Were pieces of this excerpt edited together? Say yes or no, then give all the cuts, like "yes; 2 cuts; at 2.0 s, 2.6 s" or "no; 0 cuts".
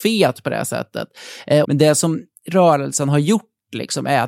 yes; 1 cut; at 1.6 s